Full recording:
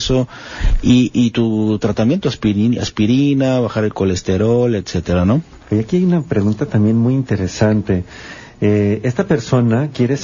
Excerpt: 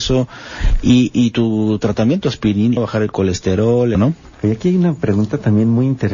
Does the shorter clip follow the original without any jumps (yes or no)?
no